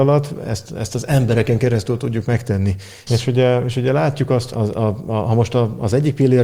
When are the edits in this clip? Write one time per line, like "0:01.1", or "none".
0:03.1
0:04.5